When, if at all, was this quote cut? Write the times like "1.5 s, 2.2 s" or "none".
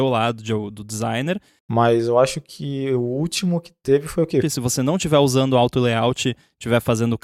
1.6 s, 4.4 s